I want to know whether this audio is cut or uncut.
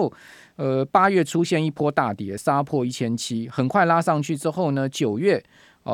uncut